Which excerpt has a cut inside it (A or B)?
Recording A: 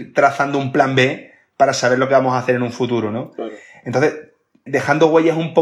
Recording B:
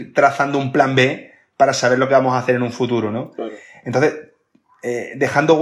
A